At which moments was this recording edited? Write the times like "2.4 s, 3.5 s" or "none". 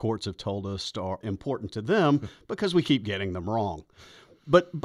1.2 s